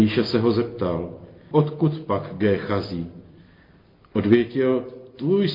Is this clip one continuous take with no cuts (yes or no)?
yes